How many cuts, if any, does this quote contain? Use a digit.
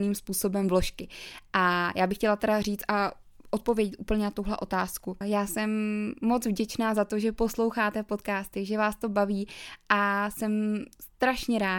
1